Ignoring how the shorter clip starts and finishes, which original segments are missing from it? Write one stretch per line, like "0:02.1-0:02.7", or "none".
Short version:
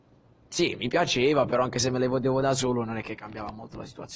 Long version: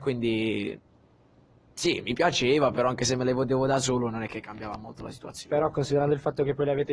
none